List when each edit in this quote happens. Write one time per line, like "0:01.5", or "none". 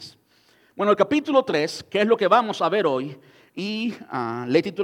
none